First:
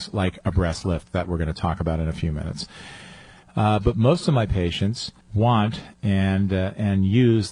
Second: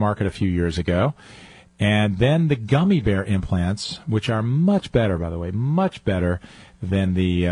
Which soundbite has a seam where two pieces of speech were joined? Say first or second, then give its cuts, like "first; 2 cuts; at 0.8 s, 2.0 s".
first; 2 cuts; at 3.4 s, 5.2 s